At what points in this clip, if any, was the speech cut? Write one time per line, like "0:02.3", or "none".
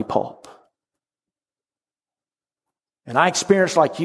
none